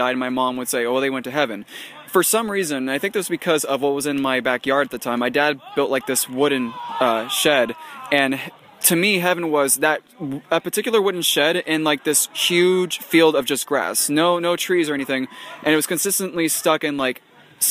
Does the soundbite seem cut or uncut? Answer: uncut